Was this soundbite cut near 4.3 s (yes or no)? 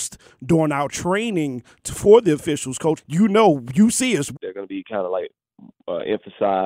yes